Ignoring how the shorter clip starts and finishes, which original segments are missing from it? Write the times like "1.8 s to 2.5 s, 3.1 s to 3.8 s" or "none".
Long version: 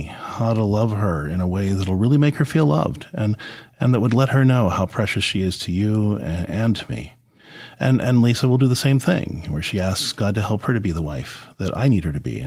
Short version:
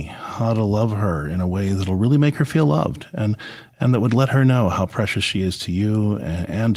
none